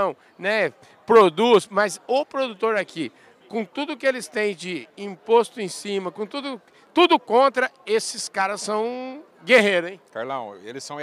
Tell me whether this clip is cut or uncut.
uncut